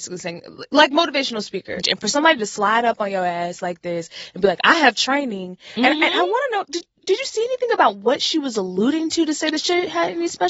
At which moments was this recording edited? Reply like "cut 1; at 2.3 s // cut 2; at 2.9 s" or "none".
cut 1; at 1.8 s